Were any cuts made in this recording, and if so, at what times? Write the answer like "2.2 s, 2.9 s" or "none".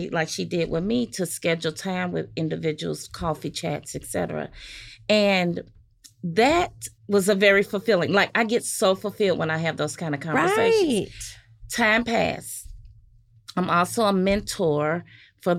7.0 s